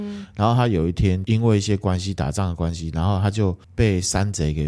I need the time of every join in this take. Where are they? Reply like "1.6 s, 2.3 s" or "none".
3.6 s